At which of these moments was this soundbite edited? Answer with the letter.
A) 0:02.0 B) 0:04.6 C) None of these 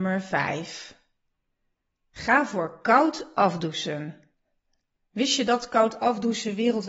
C